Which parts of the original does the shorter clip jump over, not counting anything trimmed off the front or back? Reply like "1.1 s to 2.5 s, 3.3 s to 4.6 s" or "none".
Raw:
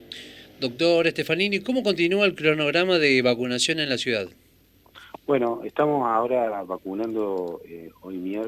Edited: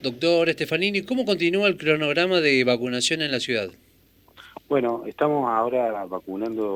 none